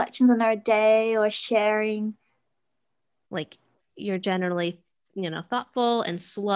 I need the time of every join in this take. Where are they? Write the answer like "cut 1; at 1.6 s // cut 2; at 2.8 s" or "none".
cut 1; at 3.3 s